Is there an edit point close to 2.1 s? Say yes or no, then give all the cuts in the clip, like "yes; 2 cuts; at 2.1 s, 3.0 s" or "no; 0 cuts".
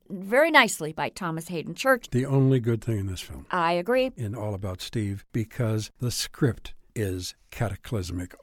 no; 1 cut; at 4.1 s